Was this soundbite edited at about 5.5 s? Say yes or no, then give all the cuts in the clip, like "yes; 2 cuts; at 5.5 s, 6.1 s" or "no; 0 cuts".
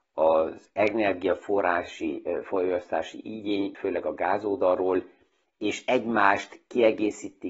no; 1 cut; at 3.7 s